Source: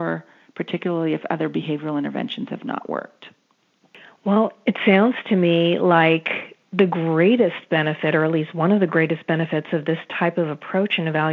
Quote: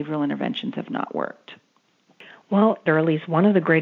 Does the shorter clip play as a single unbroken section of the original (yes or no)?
no